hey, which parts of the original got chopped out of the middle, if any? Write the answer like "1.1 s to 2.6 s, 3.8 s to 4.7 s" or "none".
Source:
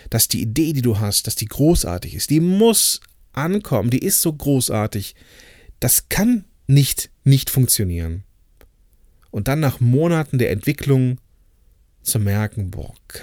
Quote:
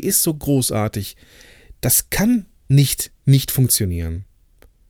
none